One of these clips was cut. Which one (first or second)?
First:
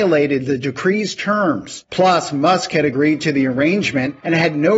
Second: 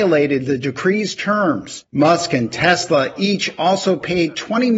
second